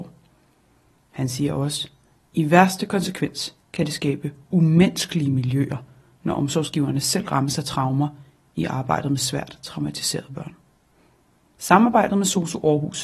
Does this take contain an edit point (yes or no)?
no